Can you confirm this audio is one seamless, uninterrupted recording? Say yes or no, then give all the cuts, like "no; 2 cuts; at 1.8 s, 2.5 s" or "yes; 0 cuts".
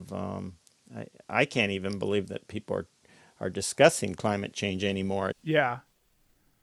no; 1 cut; at 5.3 s